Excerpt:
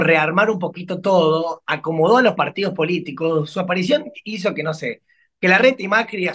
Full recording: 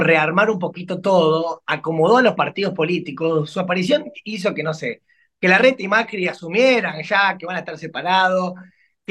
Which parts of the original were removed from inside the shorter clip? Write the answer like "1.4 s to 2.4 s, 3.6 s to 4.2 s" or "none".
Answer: none

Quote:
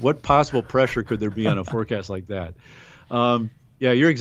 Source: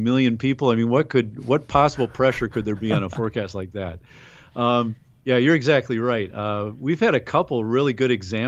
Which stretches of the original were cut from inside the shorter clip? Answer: none

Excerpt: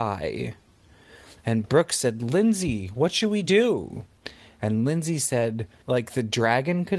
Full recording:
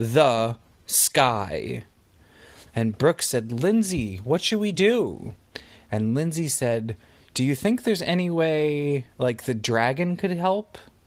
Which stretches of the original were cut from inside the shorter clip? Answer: 7.1 s to 9.1 s

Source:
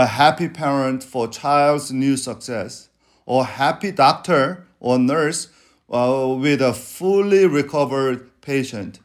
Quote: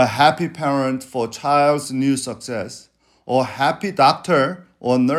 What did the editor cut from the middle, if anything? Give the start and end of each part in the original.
none

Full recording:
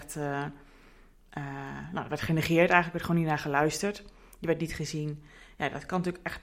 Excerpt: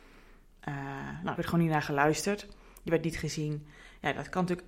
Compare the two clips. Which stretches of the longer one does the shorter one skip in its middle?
2.0 s to 2.9 s

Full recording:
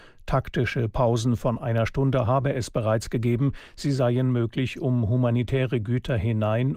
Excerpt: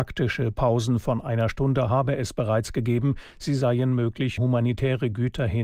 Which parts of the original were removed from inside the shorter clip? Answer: 4.7 s to 5.1 s

